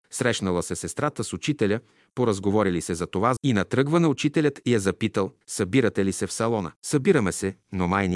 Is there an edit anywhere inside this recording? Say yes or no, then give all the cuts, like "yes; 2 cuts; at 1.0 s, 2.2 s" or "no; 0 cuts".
yes; 3 cuts; at 3.4 s, 5.4 s, 6.8 s